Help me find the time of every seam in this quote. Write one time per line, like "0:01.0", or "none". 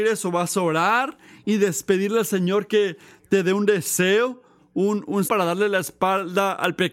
0:05.3

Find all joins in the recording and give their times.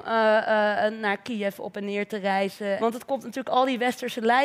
0:02.8

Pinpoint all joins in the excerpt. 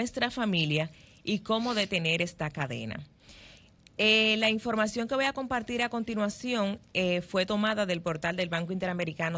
none

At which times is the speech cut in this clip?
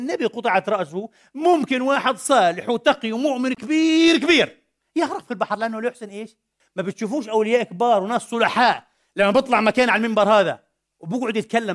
0:06.6

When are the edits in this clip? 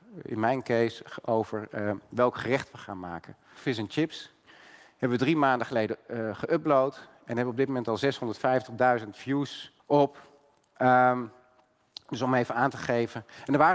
0:03.6
0:09.8

